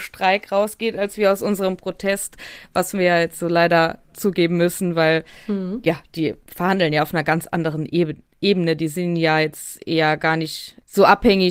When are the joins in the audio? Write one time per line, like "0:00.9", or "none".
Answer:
none